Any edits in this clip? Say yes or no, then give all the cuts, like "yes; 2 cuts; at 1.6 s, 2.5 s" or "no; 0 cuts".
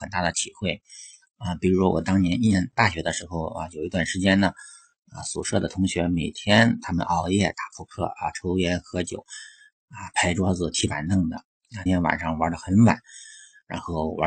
yes; 1 cut; at 11.9 s